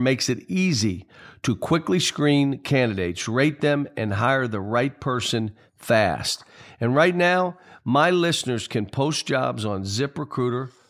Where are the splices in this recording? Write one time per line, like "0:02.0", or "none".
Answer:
none

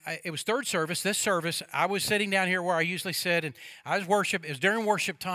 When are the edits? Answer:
0:02.0

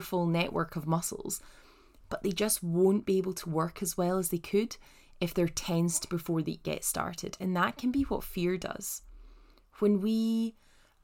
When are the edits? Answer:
0:06.6

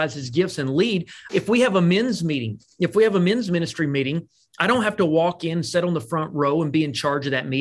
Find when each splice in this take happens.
0:01.3

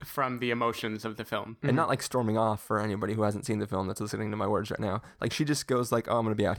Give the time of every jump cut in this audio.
0:01.6

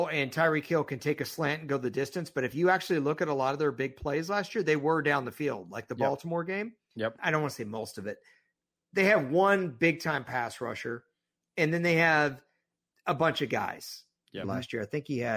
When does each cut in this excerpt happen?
0:07.2
0:14.4

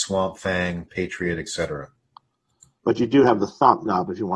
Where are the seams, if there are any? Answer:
0:02.8

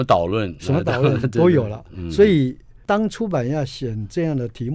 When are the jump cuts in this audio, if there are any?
none

